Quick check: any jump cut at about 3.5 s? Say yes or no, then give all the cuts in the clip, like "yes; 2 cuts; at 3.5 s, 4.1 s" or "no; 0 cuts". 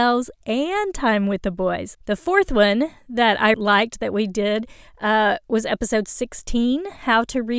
yes; 2 cuts; at 1.9 s, 3.5 s